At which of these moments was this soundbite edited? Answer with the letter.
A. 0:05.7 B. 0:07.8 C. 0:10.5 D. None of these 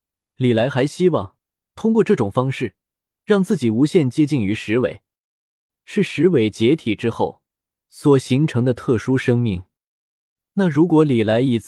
A